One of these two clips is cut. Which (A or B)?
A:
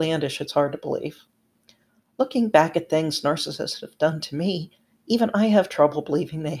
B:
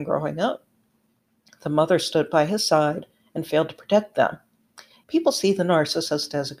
B